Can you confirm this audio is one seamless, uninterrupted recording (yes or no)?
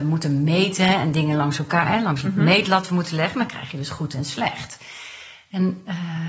yes